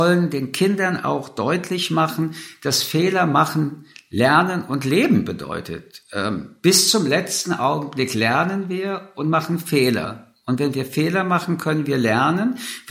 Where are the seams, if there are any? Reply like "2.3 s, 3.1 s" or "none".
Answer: none